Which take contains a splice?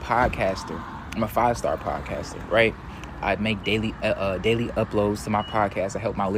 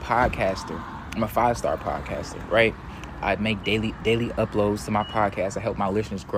second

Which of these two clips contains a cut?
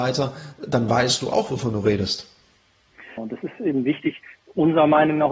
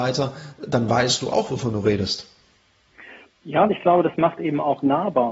first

